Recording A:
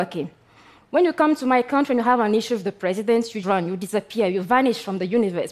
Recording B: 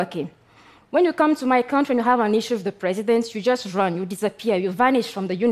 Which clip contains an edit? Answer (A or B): A